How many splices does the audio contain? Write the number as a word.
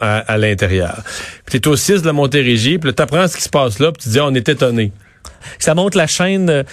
two